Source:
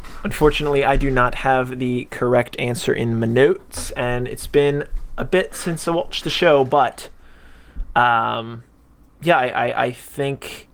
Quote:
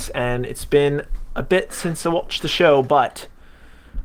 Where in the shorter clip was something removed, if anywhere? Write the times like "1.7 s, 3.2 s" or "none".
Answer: none